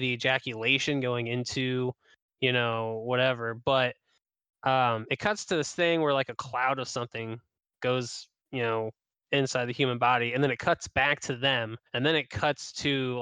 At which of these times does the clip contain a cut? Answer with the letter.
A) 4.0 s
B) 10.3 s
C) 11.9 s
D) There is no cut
C